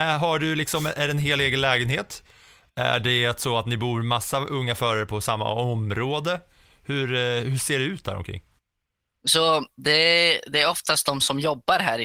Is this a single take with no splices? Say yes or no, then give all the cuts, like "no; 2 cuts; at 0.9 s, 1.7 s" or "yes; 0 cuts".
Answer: yes; 0 cuts